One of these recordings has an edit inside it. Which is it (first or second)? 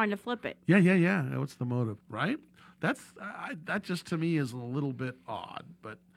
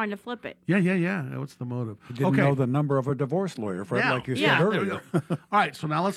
first